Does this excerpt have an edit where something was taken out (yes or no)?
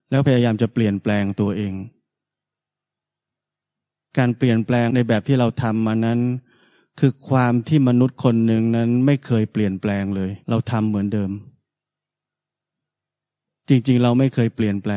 yes